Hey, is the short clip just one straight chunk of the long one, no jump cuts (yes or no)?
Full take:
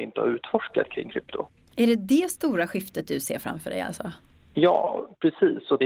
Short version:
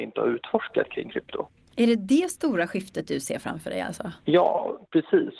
no